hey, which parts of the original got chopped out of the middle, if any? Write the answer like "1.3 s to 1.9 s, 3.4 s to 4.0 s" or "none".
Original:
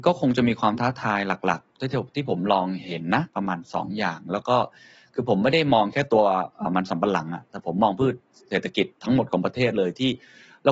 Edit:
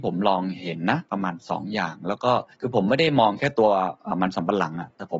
4.8 s to 5.1 s